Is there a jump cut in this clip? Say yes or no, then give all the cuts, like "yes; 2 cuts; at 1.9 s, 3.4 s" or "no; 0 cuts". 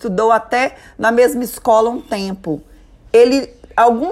no; 0 cuts